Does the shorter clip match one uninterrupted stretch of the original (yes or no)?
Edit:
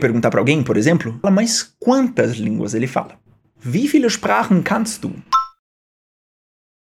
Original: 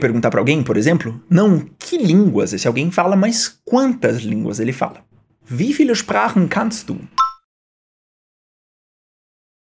no